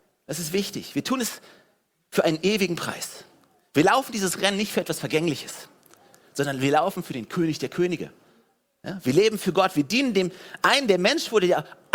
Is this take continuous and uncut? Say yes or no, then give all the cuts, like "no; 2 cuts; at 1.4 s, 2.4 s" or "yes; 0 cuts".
yes; 0 cuts